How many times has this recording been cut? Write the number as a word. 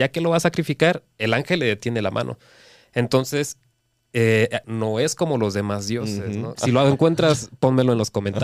two